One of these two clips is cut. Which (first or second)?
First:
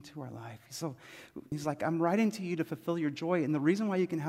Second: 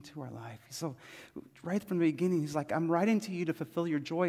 first